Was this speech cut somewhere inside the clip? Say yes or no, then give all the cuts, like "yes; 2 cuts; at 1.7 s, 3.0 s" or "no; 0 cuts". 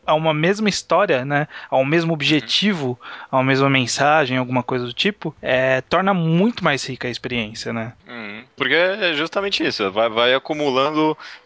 no; 0 cuts